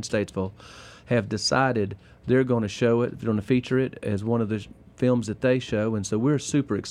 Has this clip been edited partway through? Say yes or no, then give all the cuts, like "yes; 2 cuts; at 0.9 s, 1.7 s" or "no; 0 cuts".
no; 0 cuts